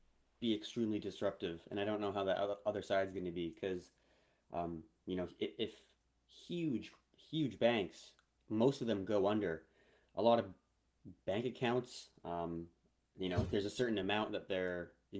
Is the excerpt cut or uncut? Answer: uncut